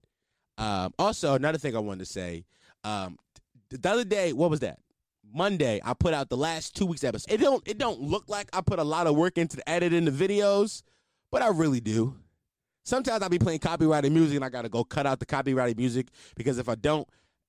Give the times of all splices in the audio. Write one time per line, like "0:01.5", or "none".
0:07.2